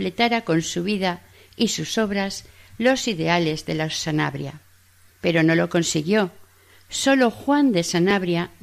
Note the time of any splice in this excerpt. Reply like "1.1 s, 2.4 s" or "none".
5.1 s